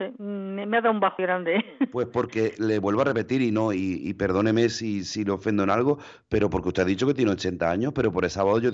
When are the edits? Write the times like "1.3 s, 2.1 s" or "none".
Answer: 1.2 s